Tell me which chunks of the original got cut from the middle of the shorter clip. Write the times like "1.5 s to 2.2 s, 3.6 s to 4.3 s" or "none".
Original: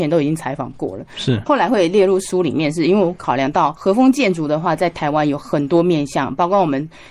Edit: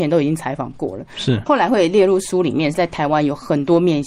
2.7 s to 4.8 s